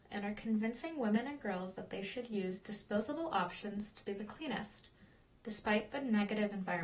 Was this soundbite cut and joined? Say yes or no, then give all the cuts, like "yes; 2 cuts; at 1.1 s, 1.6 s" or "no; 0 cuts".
no; 0 cuts